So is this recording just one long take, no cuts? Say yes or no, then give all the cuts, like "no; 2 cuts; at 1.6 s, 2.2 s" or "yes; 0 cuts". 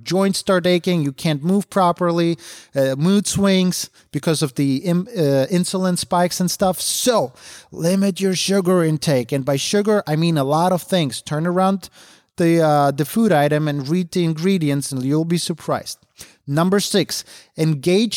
yes; 0 cuts